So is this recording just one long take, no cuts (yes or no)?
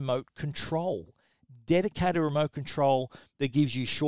yes